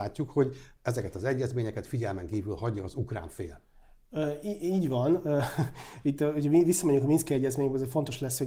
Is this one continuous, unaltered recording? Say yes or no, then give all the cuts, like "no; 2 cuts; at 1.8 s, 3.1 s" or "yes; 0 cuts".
yes; 0 cuts